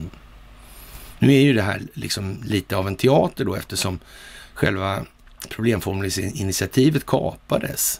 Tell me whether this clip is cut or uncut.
cut